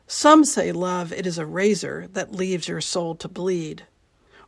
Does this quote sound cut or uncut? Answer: uncut